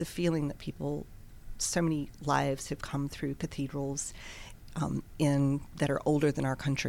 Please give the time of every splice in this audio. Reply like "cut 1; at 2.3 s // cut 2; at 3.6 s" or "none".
cut 1; at 1.5 s